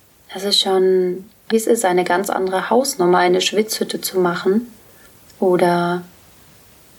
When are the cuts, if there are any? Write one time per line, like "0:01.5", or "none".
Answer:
0:01.5